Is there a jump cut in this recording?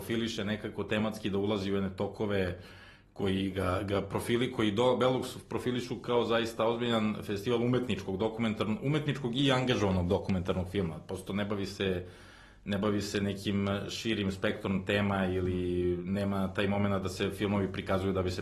no; 0 cuts

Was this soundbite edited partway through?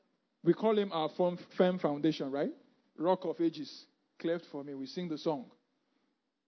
yes; 1 cut; at 2.9 s

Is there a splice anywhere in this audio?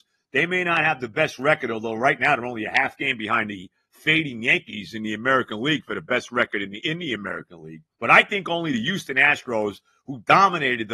yes; 1 cut; at 7.9 s

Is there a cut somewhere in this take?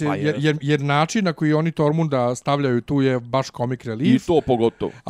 no; 0 cuts

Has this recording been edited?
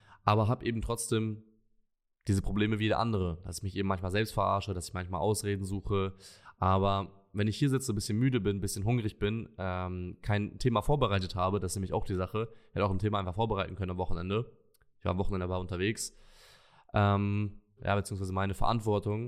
yes; 2 cuts; at 6.5 s, 17.8 s

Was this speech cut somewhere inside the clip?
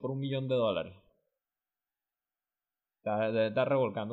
no; 0 cuts

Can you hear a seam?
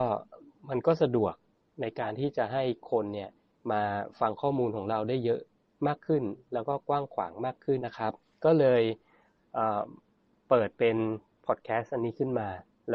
yes; 1 cut; at 7.8 s

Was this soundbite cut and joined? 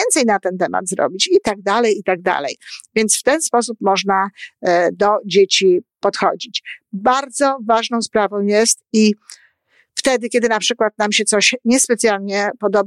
no; 0 cuts

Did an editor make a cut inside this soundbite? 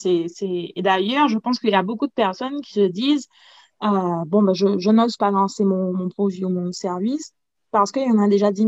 no; 0 cuts

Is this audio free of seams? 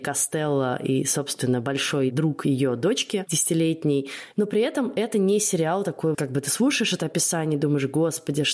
no; 2 cuts; at 4.3 s, 6.1 s

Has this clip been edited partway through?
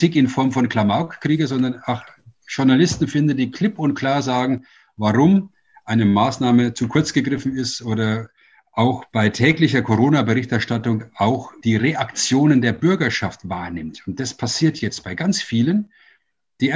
no; 0 cuts

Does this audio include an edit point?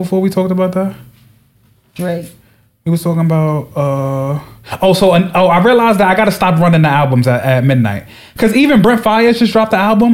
no; 0 cuts

